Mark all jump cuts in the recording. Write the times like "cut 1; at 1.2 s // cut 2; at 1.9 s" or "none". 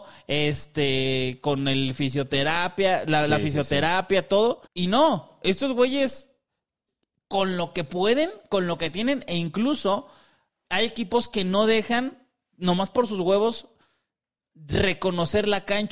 cut 1; at 4.7 s // cut 2; at 10.6 s

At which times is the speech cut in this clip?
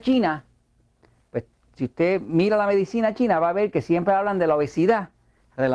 none

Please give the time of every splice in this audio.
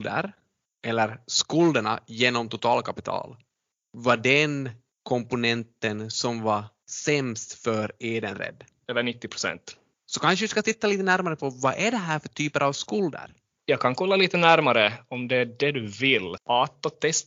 cut 1; at 13.5 s // cut 2; at 16.4 s

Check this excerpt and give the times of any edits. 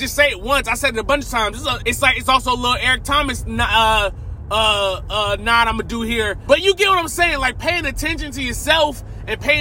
cut 1; at 1.8 s // cut 2; at 6.5 s

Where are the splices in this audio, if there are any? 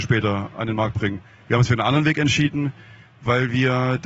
none

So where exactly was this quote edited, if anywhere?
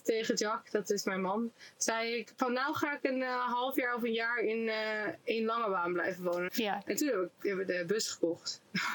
cut 1; at 6.5 s

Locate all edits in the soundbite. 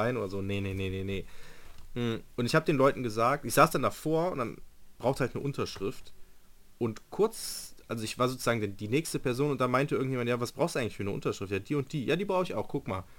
none

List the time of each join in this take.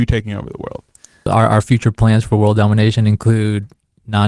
none

